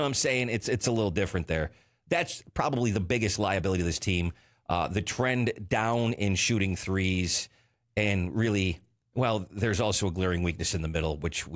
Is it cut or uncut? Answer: uncut